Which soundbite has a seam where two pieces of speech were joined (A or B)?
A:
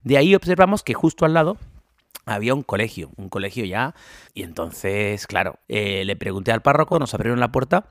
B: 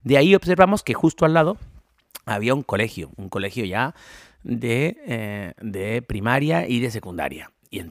A